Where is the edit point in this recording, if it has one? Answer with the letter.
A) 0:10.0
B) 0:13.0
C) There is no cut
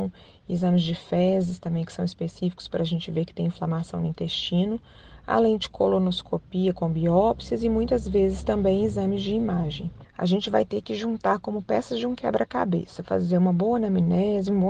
A